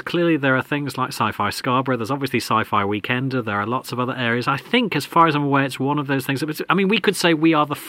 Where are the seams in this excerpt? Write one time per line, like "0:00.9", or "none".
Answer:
none